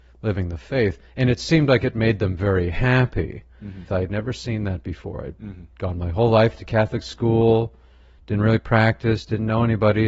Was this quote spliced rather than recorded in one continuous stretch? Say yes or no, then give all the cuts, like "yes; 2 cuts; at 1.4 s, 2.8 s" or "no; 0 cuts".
yes; 1 cut; at 3.9 s